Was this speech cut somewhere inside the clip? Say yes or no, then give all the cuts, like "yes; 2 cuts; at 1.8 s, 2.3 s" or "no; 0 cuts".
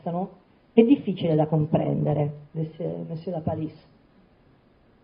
yes; 1 cut; at 2.5 s